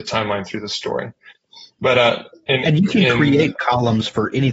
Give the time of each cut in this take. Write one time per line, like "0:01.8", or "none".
none